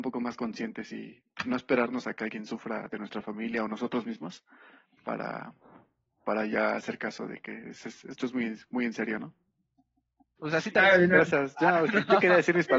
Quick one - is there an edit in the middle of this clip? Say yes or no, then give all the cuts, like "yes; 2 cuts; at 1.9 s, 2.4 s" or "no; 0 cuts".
yes; 1 cut; at 10.4 s